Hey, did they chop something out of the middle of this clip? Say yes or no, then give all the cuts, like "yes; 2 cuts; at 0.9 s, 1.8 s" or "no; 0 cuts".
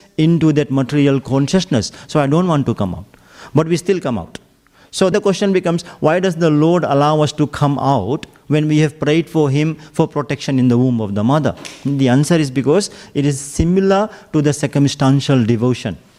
yes; 1 cut; at 5.1 s